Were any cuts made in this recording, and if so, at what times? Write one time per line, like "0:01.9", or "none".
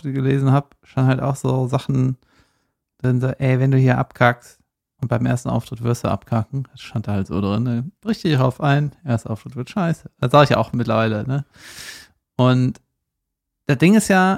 none